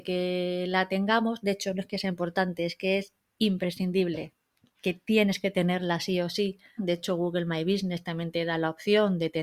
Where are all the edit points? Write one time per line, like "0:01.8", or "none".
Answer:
0:06.8